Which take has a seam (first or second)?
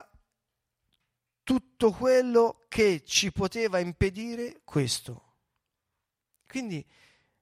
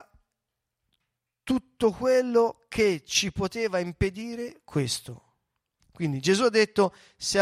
second